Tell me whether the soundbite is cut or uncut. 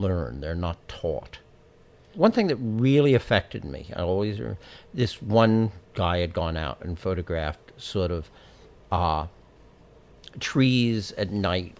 uncut